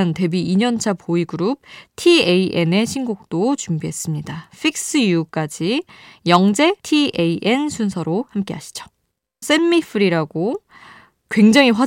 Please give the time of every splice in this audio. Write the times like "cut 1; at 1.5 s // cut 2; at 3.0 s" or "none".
cut 1; at 6.8 s // cut 2; at 9.4 s